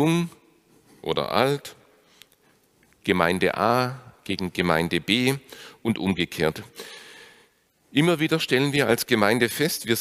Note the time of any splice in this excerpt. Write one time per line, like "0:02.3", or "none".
none